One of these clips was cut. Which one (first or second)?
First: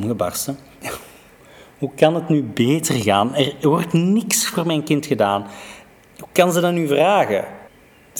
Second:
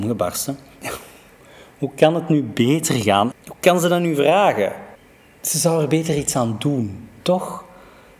second